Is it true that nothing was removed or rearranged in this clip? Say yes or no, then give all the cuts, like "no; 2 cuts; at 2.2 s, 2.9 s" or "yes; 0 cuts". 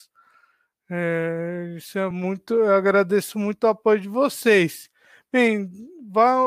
yes; 0 cuts